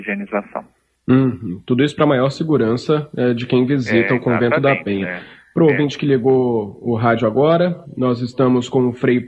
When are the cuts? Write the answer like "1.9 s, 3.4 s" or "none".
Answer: none